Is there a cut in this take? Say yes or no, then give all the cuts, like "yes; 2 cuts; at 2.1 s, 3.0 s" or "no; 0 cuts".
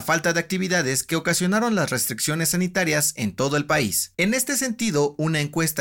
yes; 1 cut; at 4.1 s